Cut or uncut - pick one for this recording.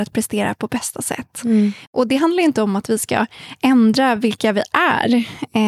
cut